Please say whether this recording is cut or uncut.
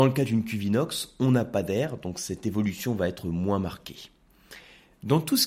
uncut